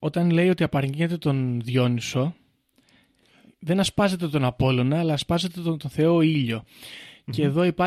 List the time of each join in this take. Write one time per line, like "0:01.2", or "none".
none